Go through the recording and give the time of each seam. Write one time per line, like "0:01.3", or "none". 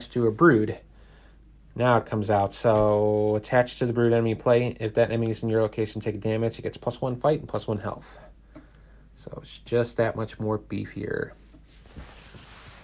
none